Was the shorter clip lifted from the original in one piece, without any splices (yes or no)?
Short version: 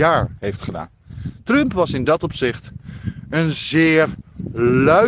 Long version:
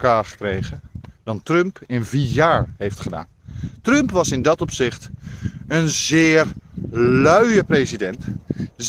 yes